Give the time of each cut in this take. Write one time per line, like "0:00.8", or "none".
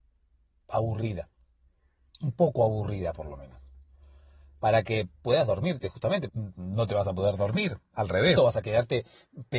0:06.3
0:08.4